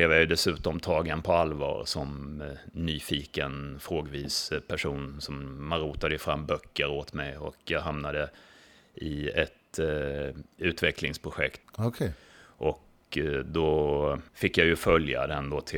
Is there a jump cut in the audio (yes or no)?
yes